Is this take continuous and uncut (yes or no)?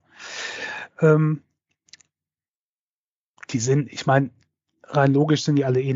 yes